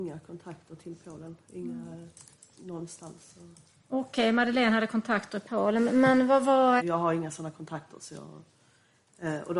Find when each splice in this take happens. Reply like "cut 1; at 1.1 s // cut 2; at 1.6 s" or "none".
cut 1; at 3.7 s // cut 2; at 6.8 s